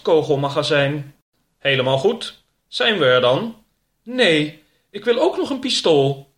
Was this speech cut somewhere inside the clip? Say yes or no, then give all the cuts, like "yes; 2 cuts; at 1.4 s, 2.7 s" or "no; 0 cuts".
no; 0 cuts